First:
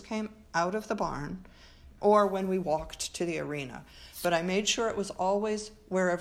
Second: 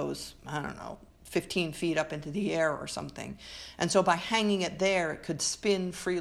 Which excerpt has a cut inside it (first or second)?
first